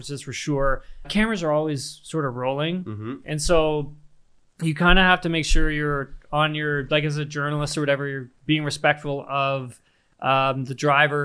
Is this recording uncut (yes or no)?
no